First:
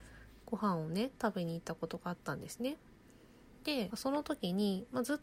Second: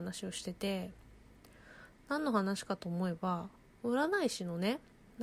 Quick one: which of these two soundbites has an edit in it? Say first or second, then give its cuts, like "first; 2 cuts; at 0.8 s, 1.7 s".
first; 1 cut; at 3.9 s